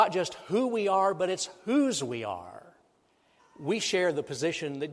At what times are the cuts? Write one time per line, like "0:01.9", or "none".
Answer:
0:03.4